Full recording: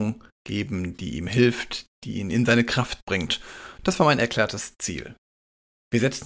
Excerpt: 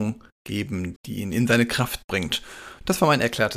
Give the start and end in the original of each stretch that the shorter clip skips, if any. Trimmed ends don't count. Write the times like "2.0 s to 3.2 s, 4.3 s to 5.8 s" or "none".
1.0 s to 1.9 s